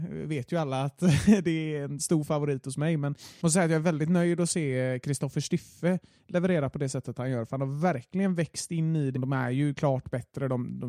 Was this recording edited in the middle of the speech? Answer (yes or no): yes